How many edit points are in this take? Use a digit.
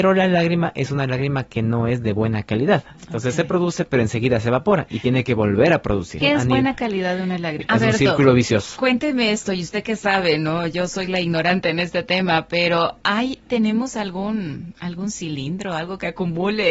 2